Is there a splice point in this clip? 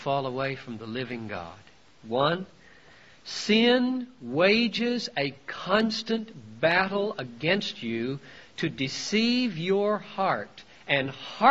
yes; 1 cut; at 2.0 s

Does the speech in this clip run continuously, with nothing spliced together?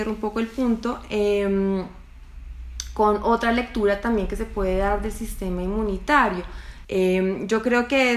no; 1 cut; at 6.8 s

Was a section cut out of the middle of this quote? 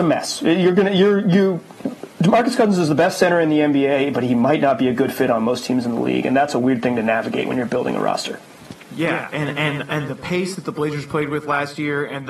no; 0 cuts

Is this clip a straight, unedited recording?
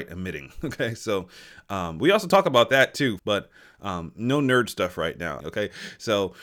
no; 2 cuts; at 3.2 s, 5.4 s

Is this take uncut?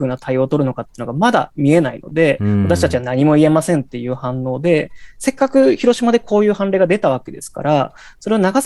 yes; 0 cuts

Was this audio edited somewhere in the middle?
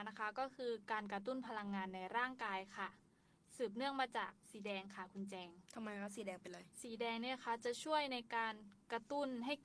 yes; 2 cuts; at 4.4 s, 6.7 s

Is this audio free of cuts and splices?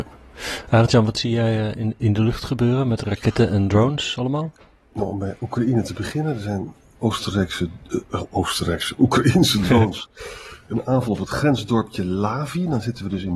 yes; 0 cuts

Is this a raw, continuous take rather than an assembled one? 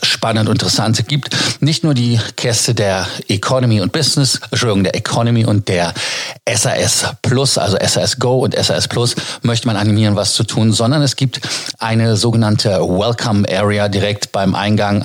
yes; 0 cuts

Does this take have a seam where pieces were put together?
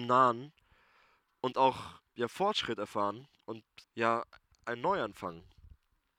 yes; 2 cuts; at 2.1 s, 3.8 s

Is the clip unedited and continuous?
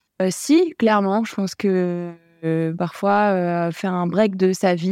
yes; 0 cuts

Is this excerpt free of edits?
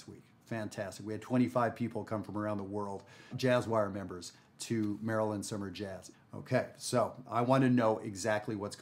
no; 2 cuts; at 3.3 s, 6.1 s

